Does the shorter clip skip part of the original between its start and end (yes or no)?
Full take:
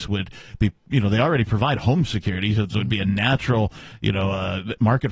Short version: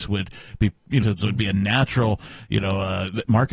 yes